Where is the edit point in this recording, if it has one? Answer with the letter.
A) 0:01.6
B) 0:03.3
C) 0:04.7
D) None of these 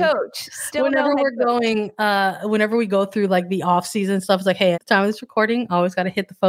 C